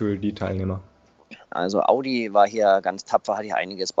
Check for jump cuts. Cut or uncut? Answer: cut